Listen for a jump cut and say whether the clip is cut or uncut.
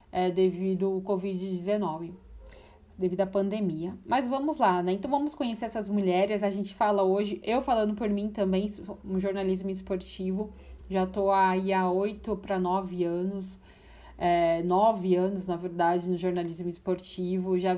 uncut